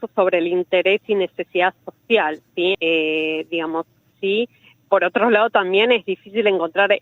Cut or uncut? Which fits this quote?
cut